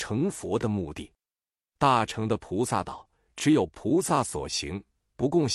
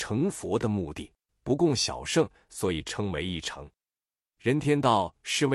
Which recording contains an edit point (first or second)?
second